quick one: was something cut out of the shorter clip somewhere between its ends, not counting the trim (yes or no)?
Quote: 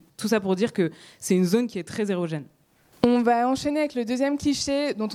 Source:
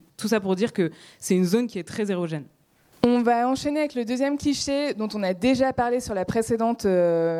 no